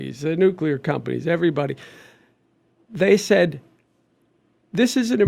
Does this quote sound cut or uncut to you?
uncut